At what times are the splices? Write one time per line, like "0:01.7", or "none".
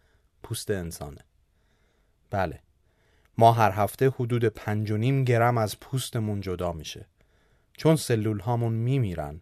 none